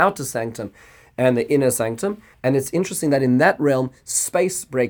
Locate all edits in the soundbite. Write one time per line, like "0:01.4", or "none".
0:02.3